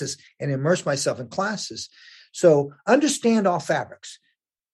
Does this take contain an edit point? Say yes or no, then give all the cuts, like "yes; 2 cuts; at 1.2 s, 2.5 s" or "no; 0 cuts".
no; 0 cuts